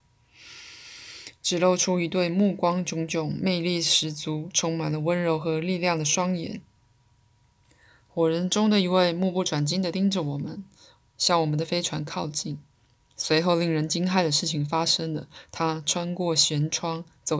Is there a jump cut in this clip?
no; 0 cuts

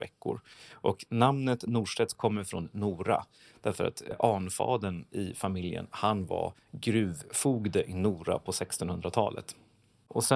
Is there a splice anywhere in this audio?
no; 0 cuts

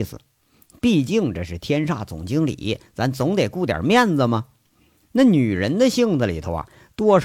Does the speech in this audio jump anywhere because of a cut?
yes; 1 cut; at 5.0 s

